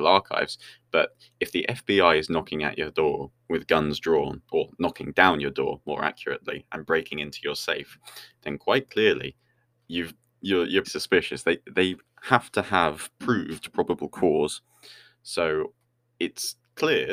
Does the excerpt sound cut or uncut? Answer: cut